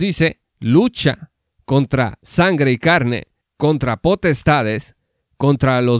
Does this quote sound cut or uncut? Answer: cut